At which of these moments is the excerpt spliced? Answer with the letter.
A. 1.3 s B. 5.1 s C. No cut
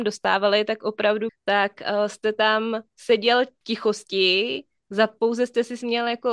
A